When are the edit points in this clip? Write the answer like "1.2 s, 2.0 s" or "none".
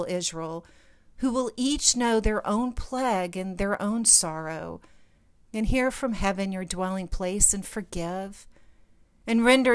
5.4 s